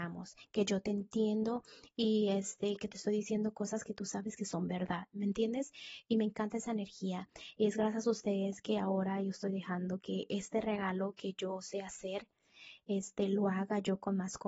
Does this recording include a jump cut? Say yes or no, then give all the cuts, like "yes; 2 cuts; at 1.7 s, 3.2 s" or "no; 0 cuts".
no; 0 cuts